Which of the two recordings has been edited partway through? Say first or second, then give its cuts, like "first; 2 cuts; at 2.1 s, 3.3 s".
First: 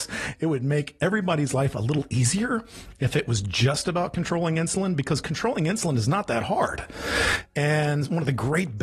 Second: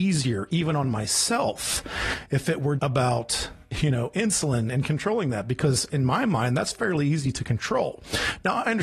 second; 1 cut; at 2.8 s